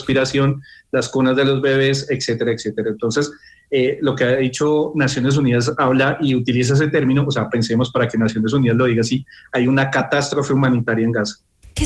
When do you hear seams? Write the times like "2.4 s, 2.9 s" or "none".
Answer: none